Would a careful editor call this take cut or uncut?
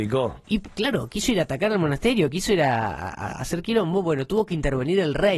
uncut